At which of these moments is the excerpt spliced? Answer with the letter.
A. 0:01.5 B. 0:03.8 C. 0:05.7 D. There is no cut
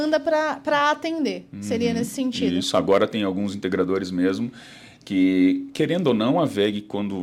D